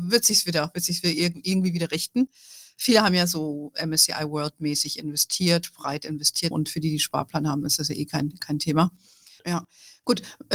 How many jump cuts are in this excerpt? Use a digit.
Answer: 2